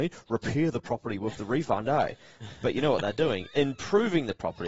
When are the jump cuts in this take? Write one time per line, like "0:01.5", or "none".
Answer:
none

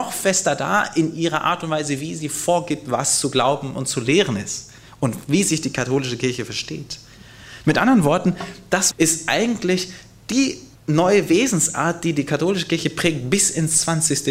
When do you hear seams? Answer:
0:08.9
0:10.7

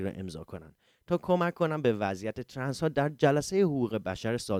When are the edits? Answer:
none

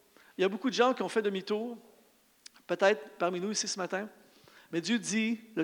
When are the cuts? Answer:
none

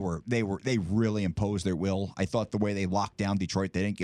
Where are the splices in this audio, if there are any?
none

